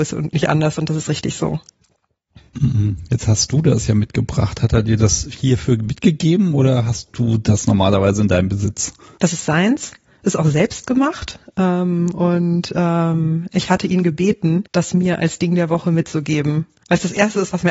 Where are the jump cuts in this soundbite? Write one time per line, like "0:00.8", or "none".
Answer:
none